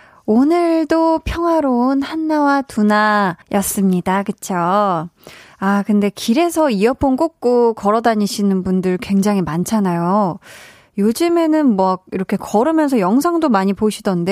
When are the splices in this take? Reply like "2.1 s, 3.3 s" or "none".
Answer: 3.4 s